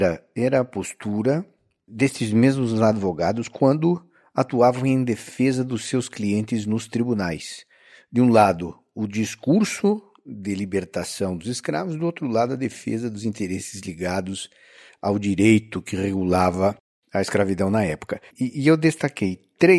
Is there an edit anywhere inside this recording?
yes; 1 cut; at 18.3 s

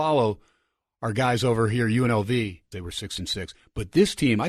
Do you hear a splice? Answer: yes; 1 cut; at 2.7 s

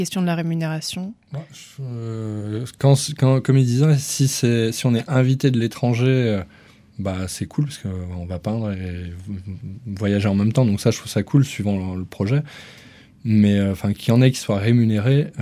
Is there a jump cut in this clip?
no; 0 cuts

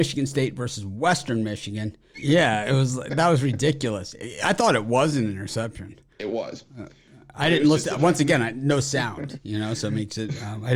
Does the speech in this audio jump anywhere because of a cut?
yes; 1 cut; at 2.1 s

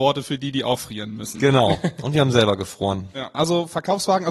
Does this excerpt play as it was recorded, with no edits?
no; 1 cut; at 3.3 s

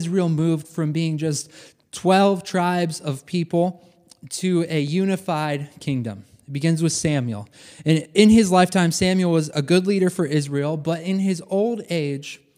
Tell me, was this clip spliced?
no; 0 cuts

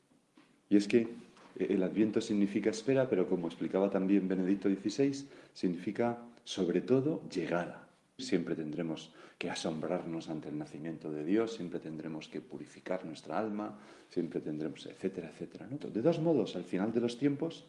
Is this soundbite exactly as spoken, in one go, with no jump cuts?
no; 2 cuts; at 8.2 s, 15.8 s

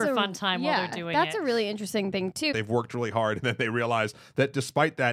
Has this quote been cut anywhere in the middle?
yes; 1 cut; at 2.5 s

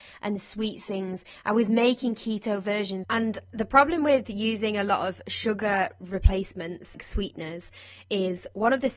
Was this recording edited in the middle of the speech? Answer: yes; 2 cuts; at 3.0 s, 6.9 s

